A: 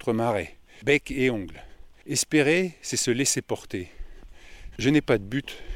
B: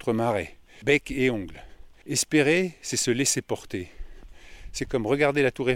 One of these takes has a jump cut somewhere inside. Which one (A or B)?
A